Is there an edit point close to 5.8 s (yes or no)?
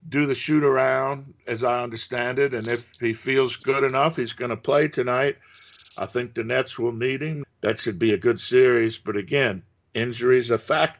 no